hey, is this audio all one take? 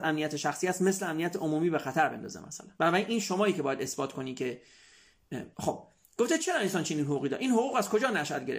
no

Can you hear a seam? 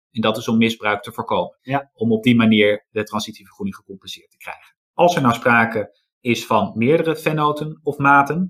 yes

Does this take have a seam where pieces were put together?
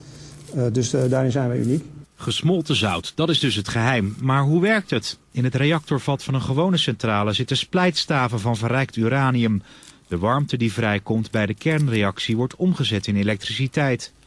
yes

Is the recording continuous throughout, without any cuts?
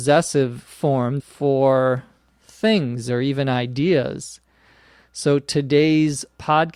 no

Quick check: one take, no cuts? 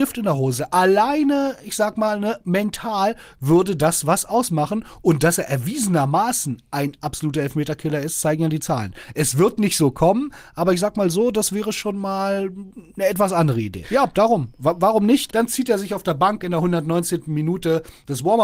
no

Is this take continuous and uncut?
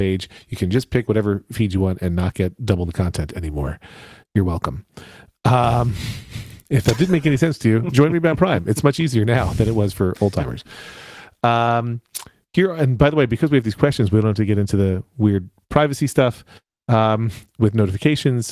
yes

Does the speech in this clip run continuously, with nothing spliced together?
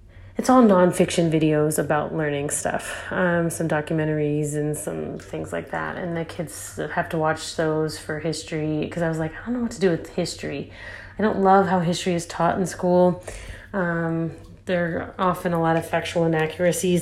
yes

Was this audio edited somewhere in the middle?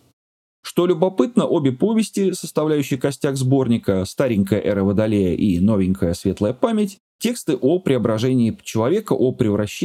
no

